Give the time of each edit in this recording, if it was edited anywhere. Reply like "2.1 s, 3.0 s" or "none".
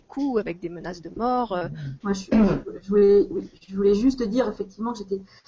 2.0 s